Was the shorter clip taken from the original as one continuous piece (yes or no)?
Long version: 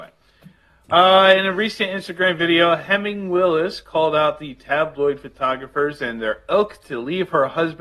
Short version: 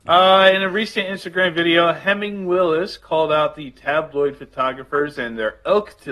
yes